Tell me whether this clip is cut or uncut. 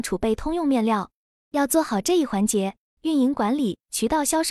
cut